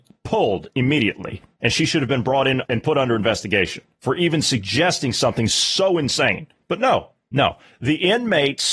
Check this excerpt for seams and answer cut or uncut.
uncut